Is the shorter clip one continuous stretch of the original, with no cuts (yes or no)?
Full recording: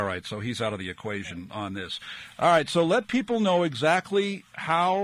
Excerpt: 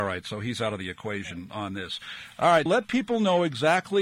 no